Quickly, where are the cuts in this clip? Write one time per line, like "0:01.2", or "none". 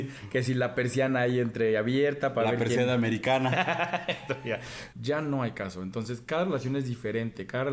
0:04.9